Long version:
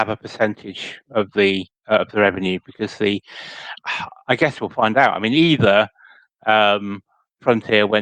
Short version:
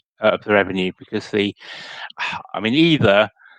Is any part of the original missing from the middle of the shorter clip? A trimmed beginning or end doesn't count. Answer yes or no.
yes